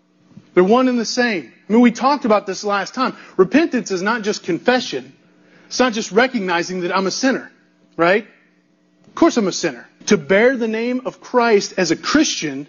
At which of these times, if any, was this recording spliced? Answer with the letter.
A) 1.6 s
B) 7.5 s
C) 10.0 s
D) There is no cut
C